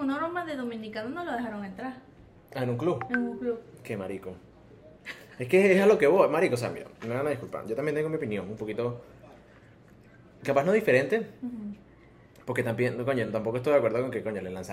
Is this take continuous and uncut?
yes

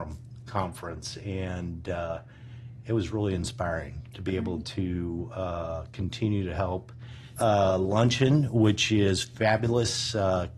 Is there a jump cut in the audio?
yes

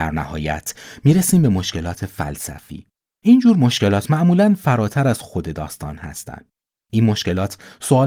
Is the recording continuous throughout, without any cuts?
yes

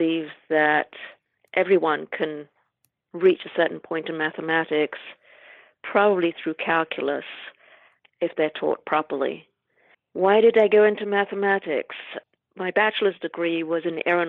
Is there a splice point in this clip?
no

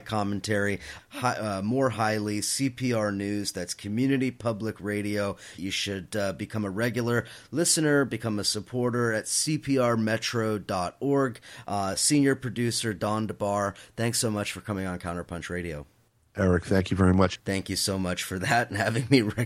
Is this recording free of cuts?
no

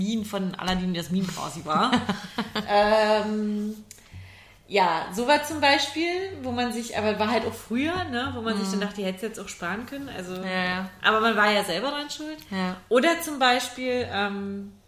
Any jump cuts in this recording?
no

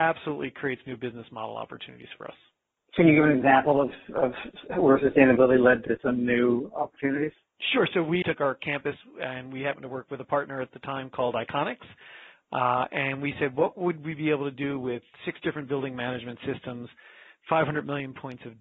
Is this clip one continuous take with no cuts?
no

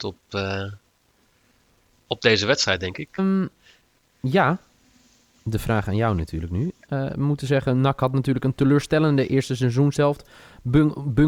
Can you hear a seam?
yes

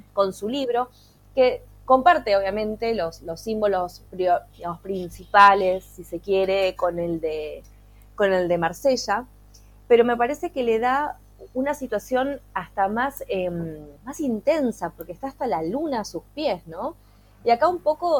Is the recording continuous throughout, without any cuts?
no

